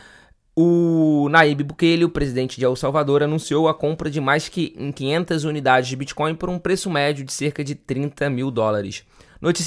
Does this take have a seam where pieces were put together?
no; 0 cuts

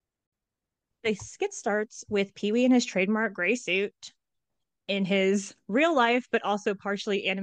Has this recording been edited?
no; 0 cuts

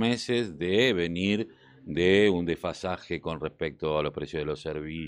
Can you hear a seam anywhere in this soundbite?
no; 0 cuts

